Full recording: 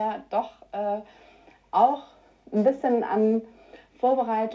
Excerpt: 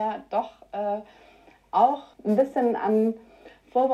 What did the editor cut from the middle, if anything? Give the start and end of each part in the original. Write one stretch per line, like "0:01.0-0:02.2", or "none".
0:02.1-0:02.4